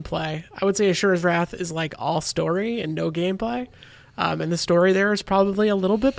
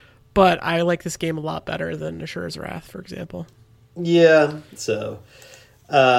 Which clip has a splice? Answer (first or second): second